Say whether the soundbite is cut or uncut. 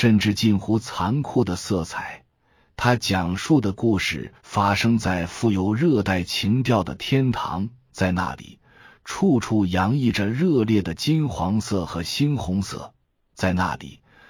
uncut